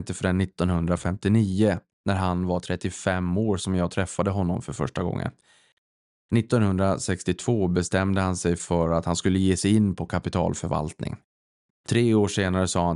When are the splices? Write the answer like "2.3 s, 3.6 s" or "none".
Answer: none